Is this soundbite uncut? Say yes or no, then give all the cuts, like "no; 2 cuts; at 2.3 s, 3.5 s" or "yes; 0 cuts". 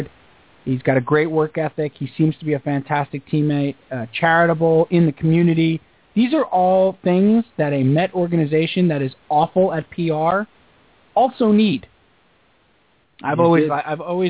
no; 1 cut; at 13.0 s